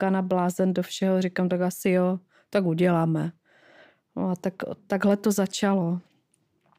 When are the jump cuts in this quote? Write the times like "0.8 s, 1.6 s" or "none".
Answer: none